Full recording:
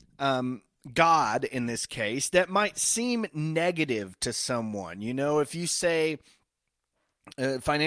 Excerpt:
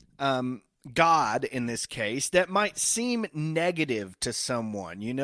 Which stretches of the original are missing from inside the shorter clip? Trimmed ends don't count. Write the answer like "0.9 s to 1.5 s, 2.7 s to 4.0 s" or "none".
none